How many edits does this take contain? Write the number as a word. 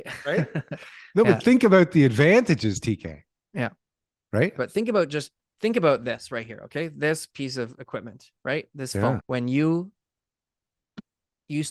two